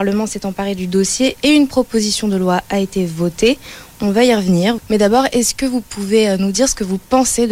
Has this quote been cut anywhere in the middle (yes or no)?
yes